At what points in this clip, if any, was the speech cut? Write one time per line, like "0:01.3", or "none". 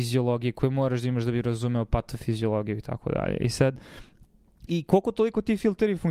0:04.7